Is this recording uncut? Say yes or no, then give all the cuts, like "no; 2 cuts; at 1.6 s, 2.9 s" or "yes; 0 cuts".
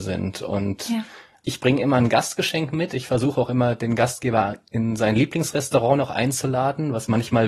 yes; 0 cuts